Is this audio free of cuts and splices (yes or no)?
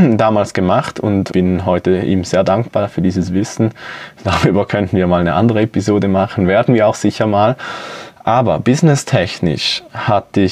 no